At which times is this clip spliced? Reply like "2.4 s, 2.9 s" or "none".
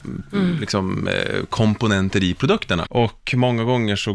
2.8 s